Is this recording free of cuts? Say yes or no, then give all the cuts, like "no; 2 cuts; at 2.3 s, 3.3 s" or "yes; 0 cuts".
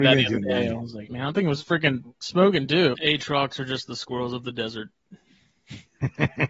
no; 2 cuts; at 1.1 s, 2.9 s